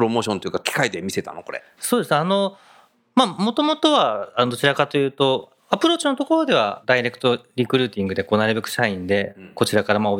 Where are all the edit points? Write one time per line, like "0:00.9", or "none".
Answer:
none